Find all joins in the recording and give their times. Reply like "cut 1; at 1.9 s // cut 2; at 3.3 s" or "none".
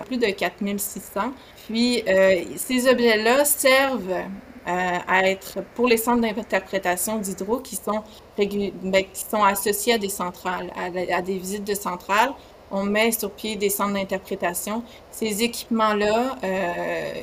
none

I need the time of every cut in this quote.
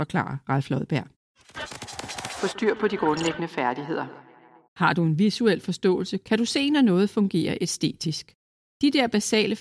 cut 1; at 4.7 s

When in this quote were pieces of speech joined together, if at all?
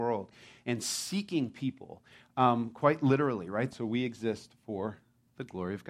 cut 1; at 3.7 s

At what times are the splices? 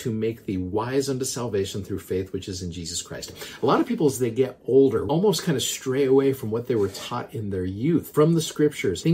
none

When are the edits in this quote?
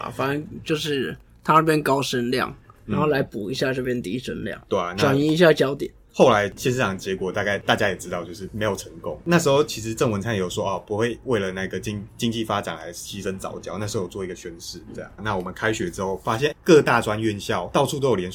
cut 1; at 15.2 s // cut 2; at 16.5 s

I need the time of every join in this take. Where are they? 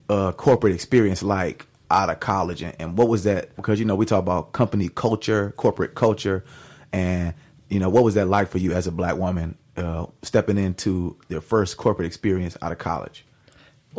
cut 1; at 3.6 s

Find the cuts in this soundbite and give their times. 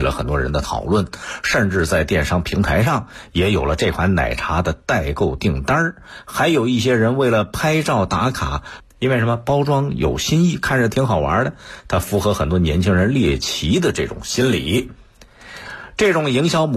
cut 1; at 8.8 s

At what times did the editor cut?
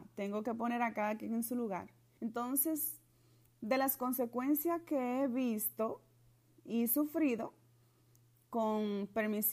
cut 1; at 2.2 s

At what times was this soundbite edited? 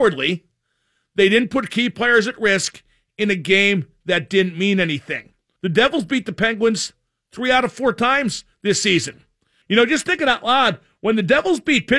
cut 1; at 5.6 s // cut 2; at 9.6 s

